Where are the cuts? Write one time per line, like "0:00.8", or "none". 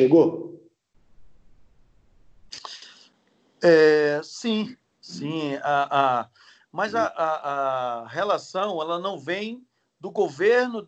none